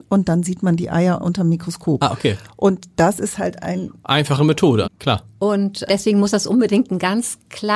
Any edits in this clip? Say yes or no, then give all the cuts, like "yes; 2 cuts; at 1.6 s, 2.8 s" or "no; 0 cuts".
yes; 2 cuts; at 4.8 s, 5.9 s